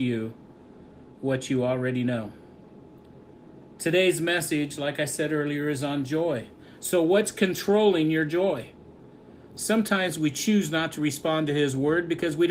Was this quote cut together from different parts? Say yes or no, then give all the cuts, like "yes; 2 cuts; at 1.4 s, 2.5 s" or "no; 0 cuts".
yes; 1 cut; at 9.5 s